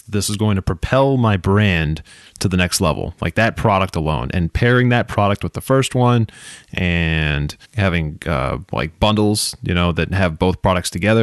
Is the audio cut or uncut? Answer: cut